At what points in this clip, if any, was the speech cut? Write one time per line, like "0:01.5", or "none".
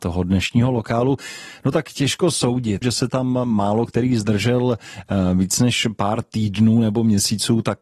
0:02.8